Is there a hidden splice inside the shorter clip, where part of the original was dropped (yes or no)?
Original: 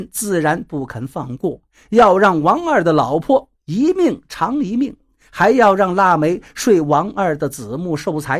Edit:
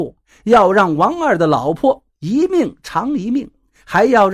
no